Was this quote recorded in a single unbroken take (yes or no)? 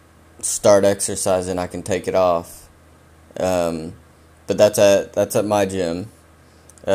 yes